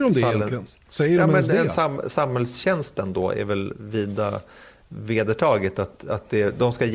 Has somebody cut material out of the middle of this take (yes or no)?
no